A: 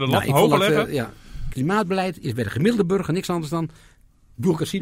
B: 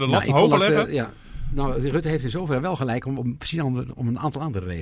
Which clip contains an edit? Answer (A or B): A